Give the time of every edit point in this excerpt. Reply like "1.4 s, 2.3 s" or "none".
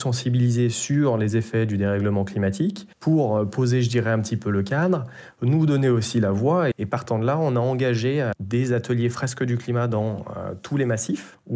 2.9 s, 6.7 s